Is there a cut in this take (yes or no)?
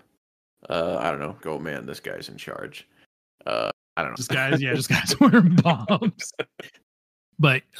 yes